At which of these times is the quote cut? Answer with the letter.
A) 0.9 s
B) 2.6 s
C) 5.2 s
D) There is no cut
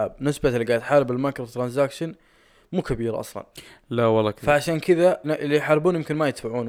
C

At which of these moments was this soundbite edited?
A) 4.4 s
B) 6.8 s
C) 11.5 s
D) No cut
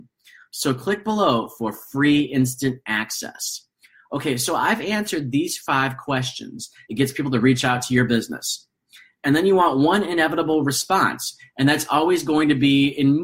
B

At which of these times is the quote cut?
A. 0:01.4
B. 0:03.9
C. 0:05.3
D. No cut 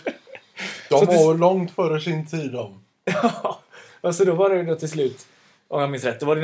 D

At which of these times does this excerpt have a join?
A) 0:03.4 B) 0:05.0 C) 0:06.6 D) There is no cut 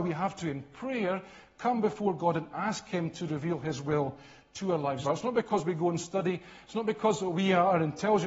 B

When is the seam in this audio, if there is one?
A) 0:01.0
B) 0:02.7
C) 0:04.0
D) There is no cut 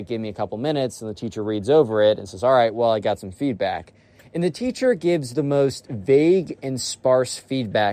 D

